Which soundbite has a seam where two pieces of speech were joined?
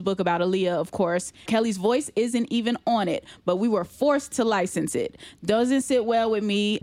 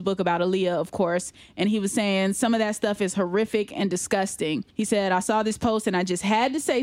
first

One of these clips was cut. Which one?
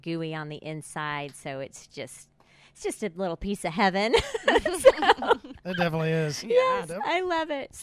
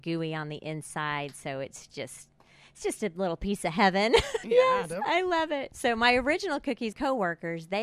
second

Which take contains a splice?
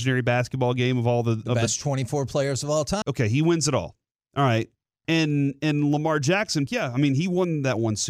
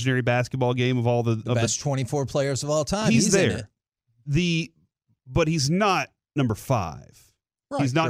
first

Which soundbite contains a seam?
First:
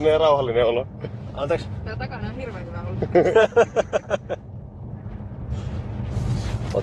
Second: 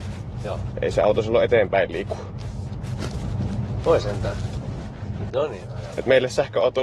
second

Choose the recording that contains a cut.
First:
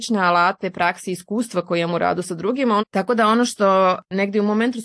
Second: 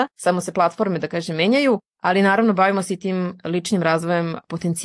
first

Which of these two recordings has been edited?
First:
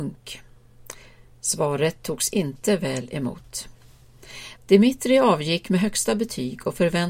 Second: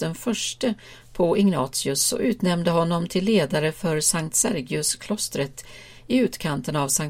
first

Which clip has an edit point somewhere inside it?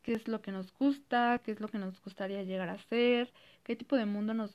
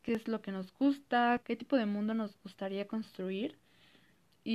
second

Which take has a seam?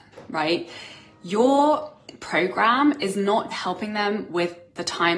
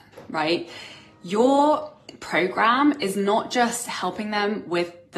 first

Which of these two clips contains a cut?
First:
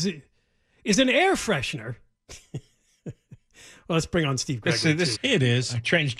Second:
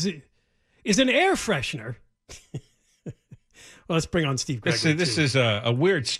first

